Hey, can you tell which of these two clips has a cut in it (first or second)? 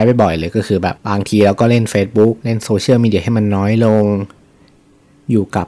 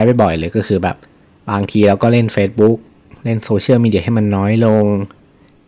first